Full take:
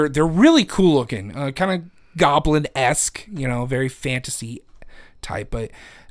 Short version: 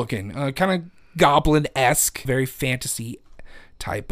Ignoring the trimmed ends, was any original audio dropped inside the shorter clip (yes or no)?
yes